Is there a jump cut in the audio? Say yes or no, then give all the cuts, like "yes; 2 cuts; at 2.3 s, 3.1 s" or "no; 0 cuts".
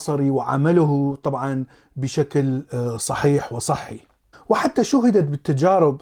no; 0 cuts